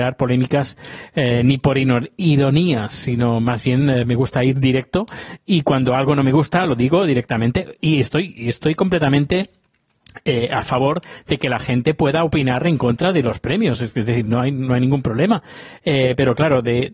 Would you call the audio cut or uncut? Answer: uncut